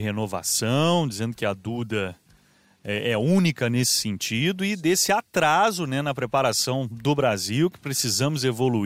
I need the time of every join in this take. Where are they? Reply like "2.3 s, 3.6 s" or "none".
none